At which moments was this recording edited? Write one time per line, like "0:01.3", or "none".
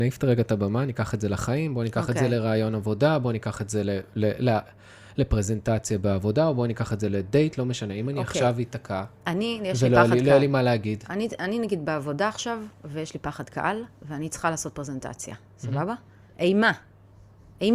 none

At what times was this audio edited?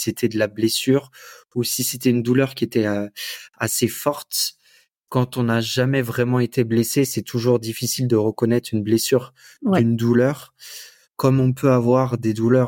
0:05.0
0:11.0

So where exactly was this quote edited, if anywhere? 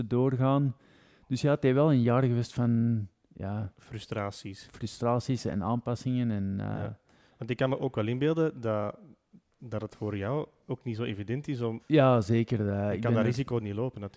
0:11.8

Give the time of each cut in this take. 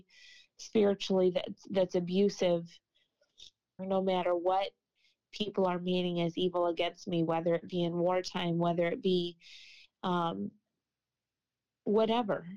0:03.8

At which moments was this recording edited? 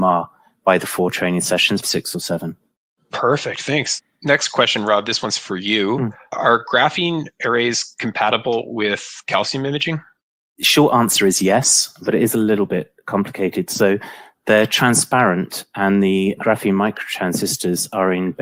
0:01.8

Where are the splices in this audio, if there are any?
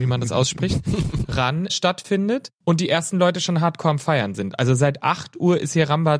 0:01.7

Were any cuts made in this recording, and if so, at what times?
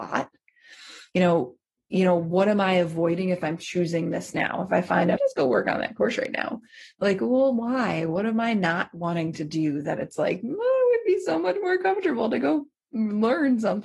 0:05.2

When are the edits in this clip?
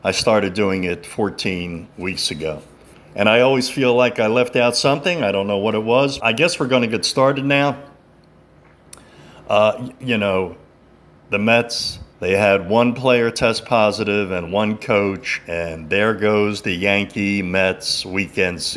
0:06.2
0:12.1

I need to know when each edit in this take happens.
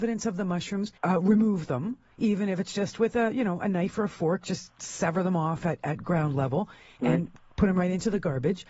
0:01.0

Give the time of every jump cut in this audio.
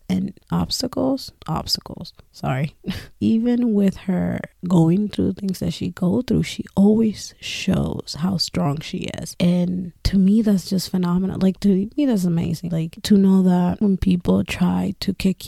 0:12.7
0:13.8

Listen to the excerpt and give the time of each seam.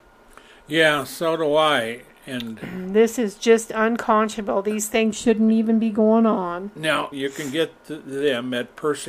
0:07.1

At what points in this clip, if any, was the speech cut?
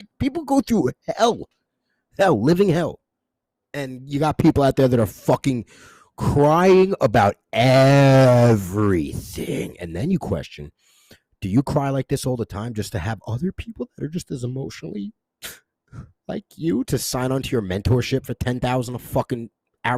none

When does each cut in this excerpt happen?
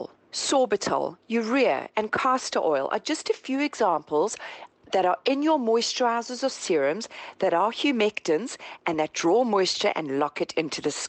none

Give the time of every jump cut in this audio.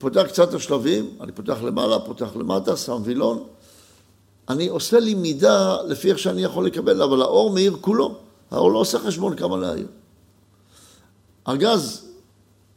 none

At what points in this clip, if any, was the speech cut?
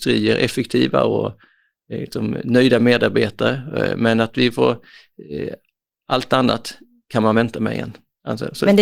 none

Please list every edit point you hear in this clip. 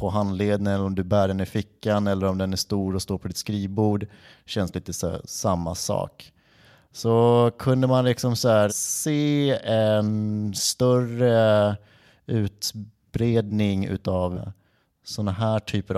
0:08.7
0:14.3

